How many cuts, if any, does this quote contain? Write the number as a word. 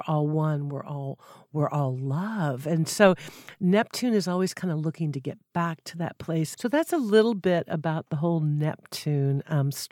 one